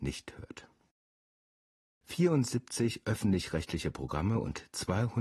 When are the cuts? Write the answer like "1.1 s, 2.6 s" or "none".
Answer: none